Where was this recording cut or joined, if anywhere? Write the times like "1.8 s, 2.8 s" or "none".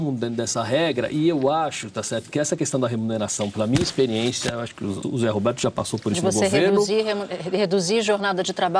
5.0 s